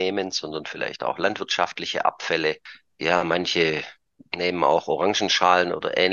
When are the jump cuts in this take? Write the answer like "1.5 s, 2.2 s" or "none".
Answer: none